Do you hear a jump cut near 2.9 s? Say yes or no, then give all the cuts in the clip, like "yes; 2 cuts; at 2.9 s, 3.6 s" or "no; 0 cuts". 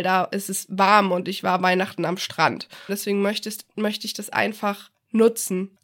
yes; 1 cut; at 2.9 s